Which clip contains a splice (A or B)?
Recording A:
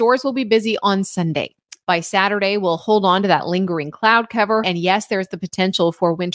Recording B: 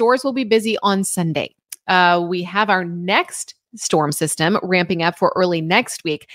A